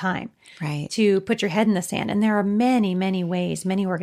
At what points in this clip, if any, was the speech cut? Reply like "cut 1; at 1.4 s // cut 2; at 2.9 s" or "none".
none